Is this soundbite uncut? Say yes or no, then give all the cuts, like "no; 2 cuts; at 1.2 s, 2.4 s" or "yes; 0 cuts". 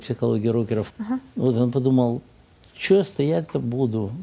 no; 1 cut; at 0.9 s